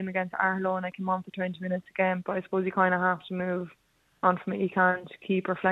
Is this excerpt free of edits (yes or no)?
no